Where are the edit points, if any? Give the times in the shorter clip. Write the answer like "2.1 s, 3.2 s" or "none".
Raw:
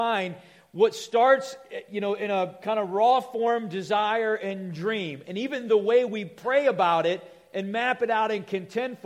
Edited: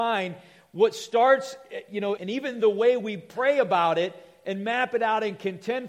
2.2 s